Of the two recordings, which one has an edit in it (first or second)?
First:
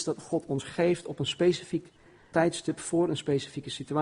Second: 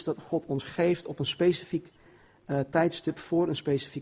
first